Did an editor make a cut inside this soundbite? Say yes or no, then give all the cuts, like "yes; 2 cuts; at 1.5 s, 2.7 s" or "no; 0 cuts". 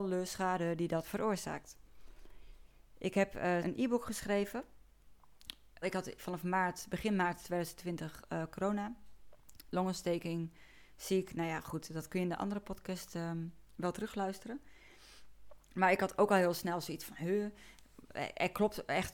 yes; 2 cuts; at 3.6 s, 5.8 s